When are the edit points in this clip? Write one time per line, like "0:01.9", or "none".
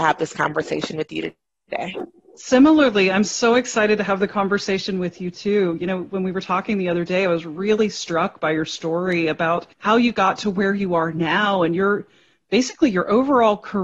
0:09.7